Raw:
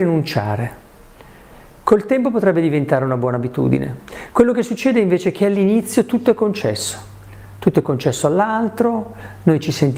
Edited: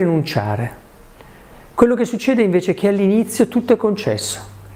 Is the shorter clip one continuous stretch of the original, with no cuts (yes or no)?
no